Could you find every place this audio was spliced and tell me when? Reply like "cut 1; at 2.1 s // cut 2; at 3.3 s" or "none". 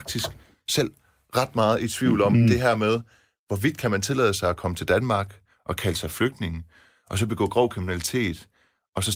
none